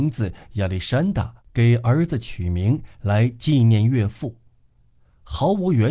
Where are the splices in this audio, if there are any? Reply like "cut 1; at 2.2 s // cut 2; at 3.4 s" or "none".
none